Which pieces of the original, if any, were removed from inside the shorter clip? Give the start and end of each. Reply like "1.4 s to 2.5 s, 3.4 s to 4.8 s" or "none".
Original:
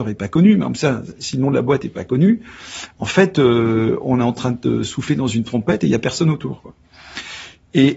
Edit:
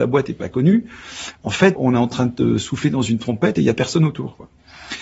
3.3 s to 4.0 s